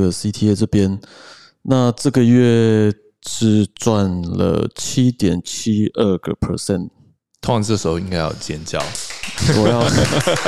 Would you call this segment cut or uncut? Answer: uncut